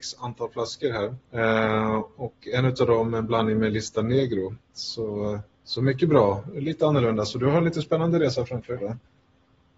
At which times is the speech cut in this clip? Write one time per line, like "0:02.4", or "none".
0:01.2